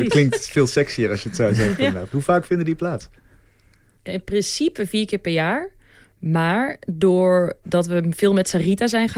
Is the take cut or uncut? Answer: uncut